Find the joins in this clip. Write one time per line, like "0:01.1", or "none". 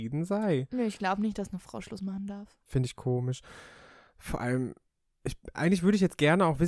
none